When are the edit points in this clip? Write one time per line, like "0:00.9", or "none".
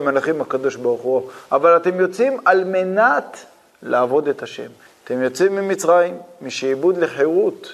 0:04.9